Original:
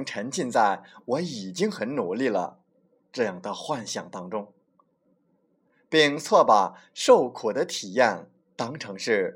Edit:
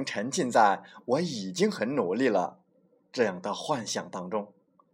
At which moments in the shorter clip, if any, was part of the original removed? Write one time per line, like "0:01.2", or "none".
none